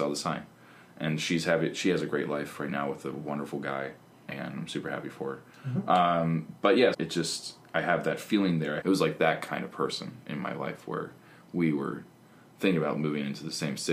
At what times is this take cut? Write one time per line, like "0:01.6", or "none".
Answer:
0:06.9
0:08.8